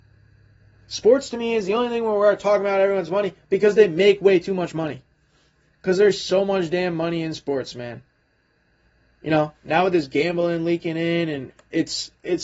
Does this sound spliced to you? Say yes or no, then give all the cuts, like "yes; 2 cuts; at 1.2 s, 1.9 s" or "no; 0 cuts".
yes; 1 cut; at 11.5 s